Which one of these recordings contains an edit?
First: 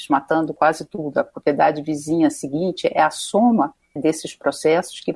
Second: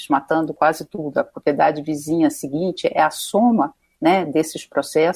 first; 1 cut; at 4.0 s

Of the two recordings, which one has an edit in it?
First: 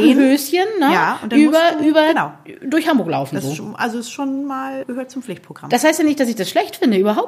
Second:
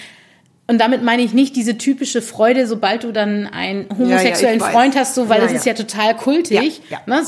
first; 1 cut; at 4.8 s

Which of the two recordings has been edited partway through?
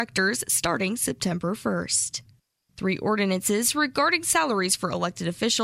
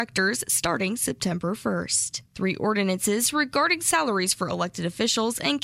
second; 1 cut; at 2.3 s

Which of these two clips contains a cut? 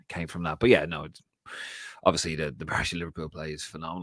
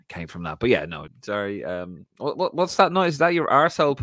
second; 1 cut; at 1.1 s

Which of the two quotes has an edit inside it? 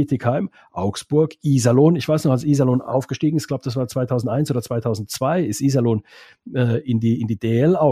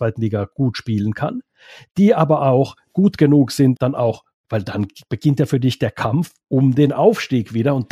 second; 2 cuts; at 3.8 s, 6.4 s

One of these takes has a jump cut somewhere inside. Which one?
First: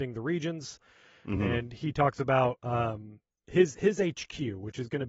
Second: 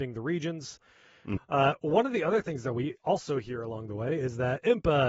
second; 1 cut; at 1.4 s

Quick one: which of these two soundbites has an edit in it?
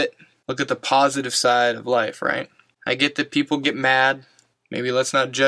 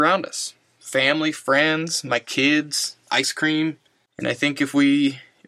first; 1 cut; at 4.5 s

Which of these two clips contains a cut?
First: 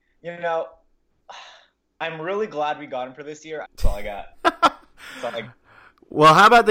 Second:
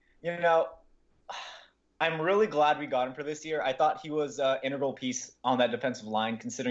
first; 1 cut; at 3.6 s

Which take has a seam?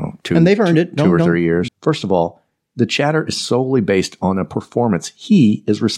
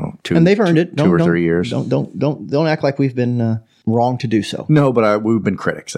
first; 1 cut; at 1.7 s

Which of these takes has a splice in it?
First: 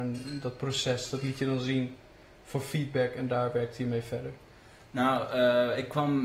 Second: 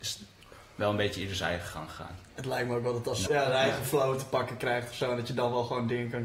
second; 1 cut; at 3.3 s

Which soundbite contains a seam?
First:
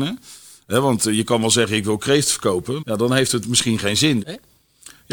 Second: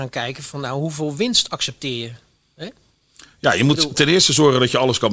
first; 2 cuts; at 2.8 s, 4.2 s

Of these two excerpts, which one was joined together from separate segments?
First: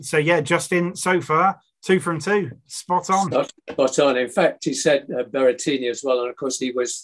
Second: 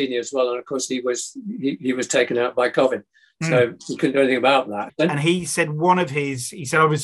second; 1 cut; at 4.9 s

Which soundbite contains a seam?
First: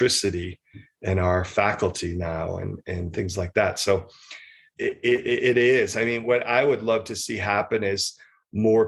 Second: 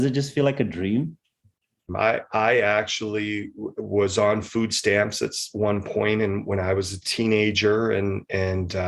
second; 1 cut; at 1.9 s

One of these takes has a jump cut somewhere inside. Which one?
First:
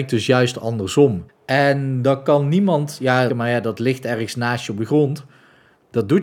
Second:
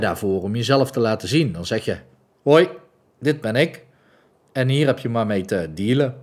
first; 2 cuts; at 1.3 s, 3.3 s

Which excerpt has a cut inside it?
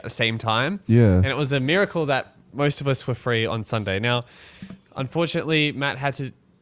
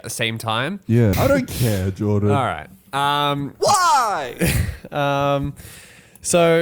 second; 1 cut; at 1.1 s

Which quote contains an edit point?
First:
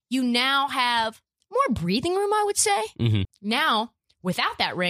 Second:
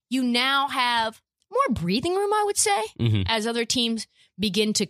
first; 1 cut; at 3.2 s

